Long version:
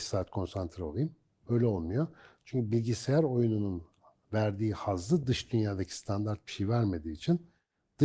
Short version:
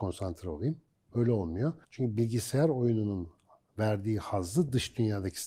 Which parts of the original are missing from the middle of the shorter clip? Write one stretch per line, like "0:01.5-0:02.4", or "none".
0:02.2-0:02.4